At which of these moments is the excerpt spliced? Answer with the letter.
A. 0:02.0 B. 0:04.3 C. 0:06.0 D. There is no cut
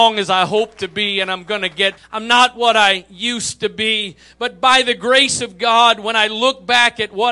A